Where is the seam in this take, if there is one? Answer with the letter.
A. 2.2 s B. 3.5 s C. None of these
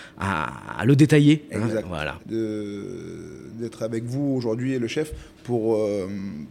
A